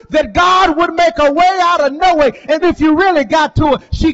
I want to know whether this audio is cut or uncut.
cut